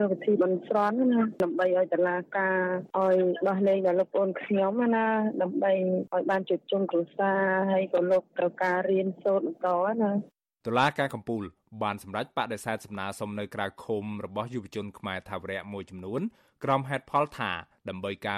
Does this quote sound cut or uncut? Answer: uncut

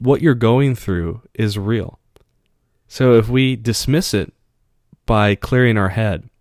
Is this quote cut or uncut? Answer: uncut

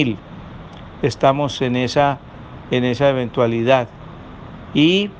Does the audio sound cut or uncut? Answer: uncut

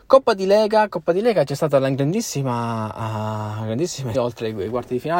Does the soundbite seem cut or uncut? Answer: cut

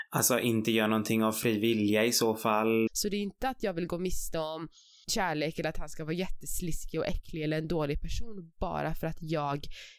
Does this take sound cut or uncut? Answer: cut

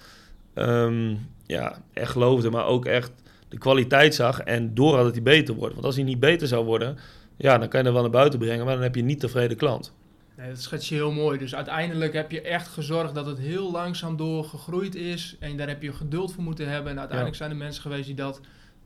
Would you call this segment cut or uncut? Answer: uncut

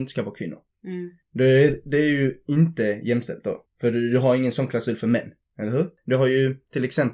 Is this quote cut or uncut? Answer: uncut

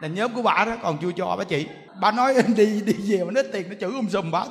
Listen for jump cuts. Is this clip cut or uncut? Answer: cut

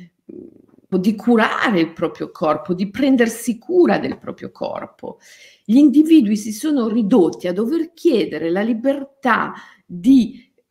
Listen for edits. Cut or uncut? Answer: cut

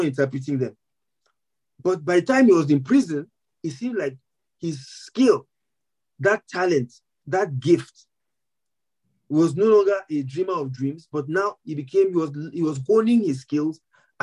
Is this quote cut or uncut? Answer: uncut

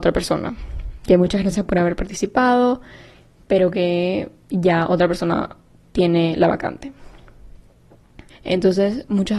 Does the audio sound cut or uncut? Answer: cut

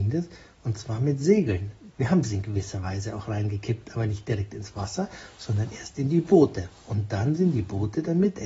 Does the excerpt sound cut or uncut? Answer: cut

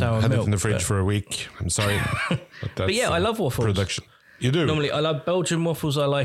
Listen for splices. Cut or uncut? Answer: uncut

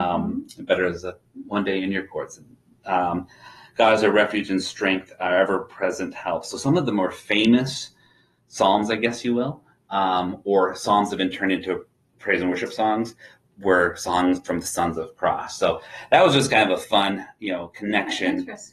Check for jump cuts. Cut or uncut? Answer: uncut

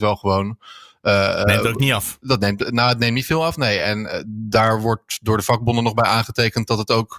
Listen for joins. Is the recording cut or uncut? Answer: uncut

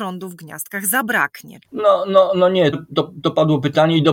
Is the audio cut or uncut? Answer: cut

